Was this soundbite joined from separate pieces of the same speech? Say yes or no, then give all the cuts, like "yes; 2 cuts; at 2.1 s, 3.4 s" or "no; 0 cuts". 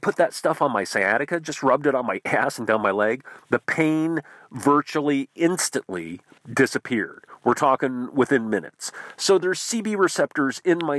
no; 0 cuts